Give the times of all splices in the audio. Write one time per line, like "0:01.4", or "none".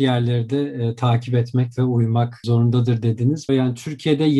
0:03.5